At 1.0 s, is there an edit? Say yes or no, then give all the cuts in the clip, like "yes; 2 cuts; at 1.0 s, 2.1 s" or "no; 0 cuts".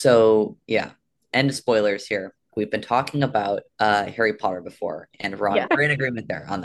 no; 3 cuts; at 2.5 s, 3.7 s, 5.7 s